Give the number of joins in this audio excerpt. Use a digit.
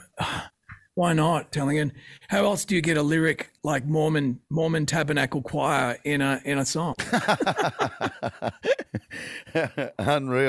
1